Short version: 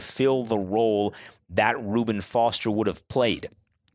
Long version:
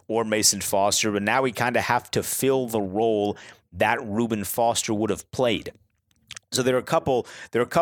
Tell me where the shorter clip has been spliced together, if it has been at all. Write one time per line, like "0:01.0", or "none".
none